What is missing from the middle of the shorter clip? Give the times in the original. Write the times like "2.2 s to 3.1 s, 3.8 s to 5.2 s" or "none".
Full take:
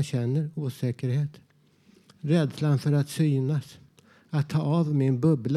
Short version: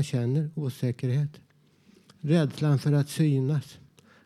none